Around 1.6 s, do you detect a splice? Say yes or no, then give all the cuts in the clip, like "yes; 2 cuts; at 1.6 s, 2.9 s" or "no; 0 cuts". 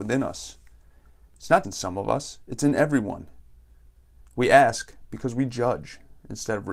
yes; 2 cuts; at 1.6 s, 4.2 s